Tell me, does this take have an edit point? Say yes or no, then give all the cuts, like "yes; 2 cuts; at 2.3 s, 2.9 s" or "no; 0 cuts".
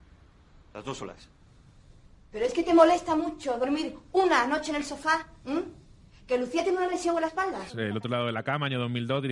yes; 1 cut; at 7.7 s